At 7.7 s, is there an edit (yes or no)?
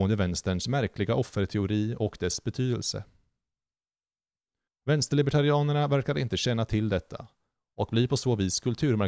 no